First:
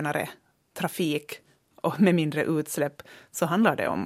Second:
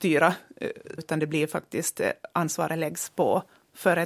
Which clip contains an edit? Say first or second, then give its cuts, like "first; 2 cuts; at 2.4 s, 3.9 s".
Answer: second; 1 cut; at 1.0 s